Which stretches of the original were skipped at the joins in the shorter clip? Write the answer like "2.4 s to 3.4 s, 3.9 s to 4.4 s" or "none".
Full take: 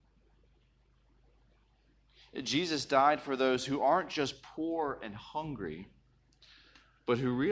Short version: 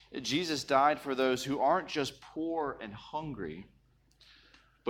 none